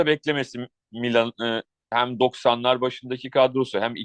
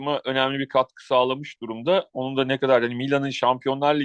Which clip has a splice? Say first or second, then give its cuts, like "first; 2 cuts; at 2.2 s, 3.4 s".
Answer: first; 1 cut; at 1.9 s